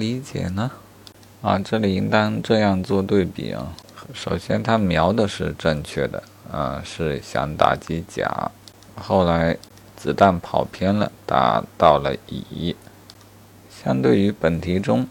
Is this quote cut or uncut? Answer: cut